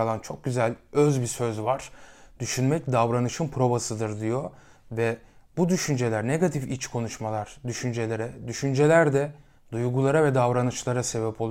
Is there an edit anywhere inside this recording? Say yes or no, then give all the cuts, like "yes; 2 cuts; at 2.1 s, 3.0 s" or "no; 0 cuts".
no; 0 cuts